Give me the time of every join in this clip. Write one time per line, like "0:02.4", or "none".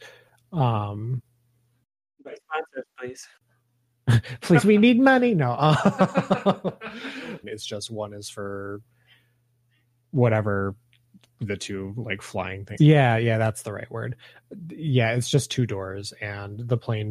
0:04.6
0:07.4
0:12.8

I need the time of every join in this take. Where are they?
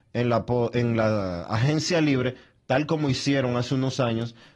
none

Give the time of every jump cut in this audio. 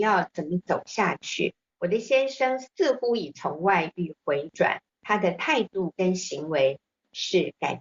0:01.7
0:04.9

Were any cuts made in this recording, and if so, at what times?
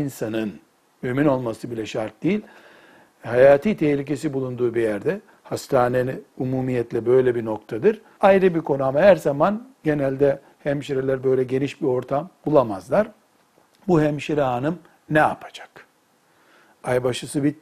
0:08.2

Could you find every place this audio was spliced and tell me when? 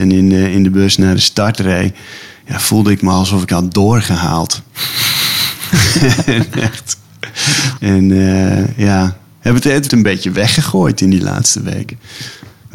0:07.8
0:09.9

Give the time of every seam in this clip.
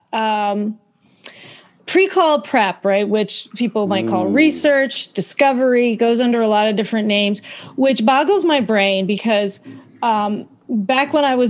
none

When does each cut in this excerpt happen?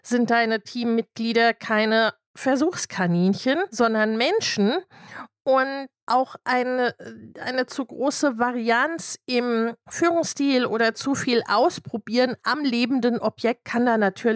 none

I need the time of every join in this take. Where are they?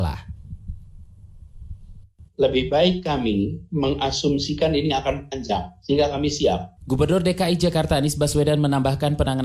0:02.3
0:06.8

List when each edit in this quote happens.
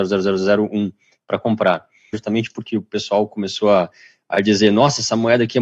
0:02.1

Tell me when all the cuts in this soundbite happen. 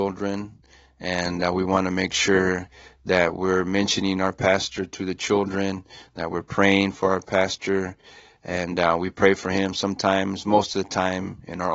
none

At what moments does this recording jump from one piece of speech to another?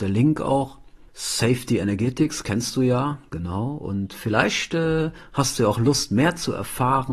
0:01.1

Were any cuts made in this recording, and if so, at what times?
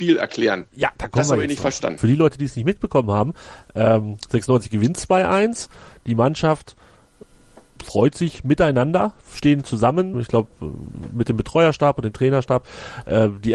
0:02.0
0:10.1

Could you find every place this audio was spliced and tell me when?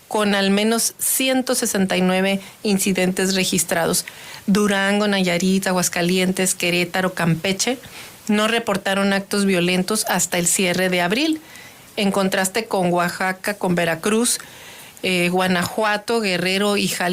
none

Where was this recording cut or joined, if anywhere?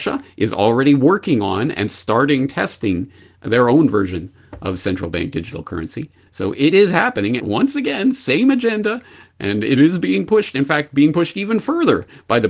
0:07.4

